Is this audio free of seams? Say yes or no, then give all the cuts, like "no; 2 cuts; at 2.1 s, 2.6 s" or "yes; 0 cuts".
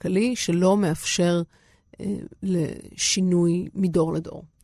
yes; 0 cuts